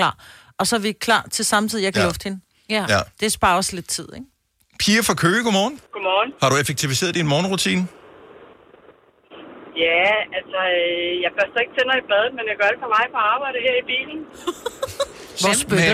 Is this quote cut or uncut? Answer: cut